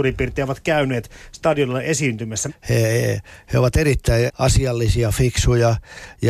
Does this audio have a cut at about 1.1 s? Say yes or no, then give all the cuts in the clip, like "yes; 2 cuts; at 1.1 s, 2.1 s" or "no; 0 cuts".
no; 2 cuts; at 2.5 s, 4.3 s